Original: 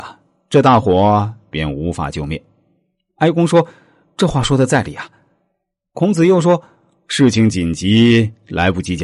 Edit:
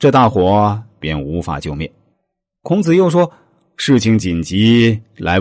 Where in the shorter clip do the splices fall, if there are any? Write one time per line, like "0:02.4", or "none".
0:02.1